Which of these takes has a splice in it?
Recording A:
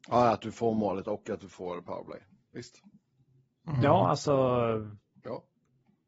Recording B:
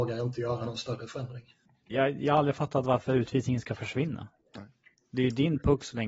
B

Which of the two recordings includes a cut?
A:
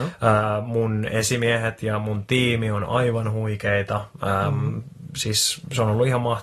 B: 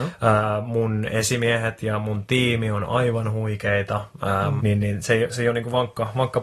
B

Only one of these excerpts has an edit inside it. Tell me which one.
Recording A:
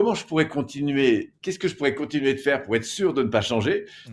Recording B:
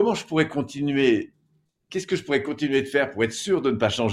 A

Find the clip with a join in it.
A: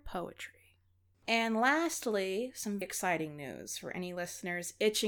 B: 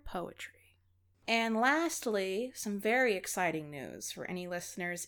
A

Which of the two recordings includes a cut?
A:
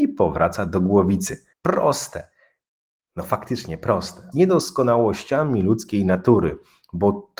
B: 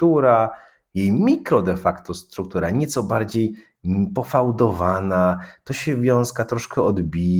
A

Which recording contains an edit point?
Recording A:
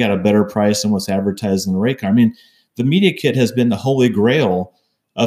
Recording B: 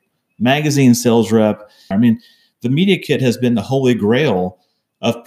B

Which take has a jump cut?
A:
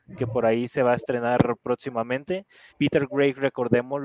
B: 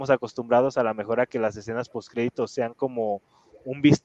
A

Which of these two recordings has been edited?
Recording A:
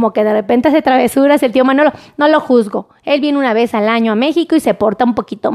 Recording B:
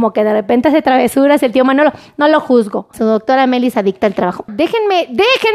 B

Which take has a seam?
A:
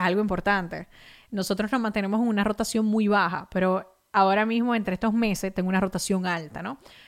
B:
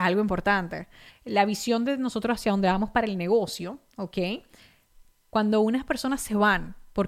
B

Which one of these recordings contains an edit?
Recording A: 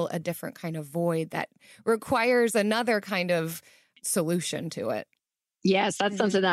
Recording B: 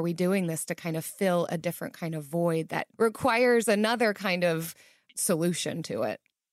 B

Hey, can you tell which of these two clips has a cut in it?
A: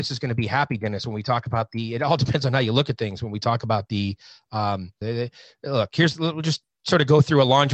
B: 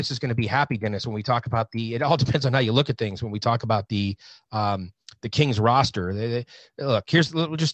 A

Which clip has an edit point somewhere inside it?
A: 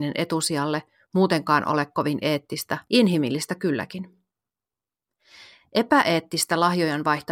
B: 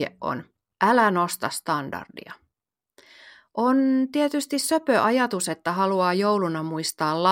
A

